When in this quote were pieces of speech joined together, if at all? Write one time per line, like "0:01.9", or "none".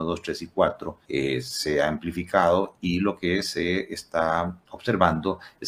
0:01.0
0:04.7